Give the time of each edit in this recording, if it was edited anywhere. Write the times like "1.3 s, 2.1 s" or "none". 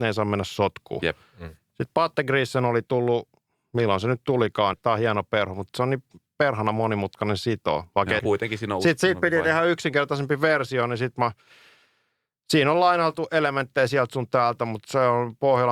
4.7 s, 8.2 s